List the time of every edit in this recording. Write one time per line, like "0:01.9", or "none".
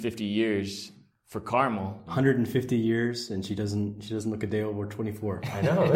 0:02.1